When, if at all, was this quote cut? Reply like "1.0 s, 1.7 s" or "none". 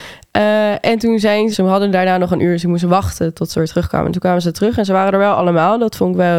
1.5 s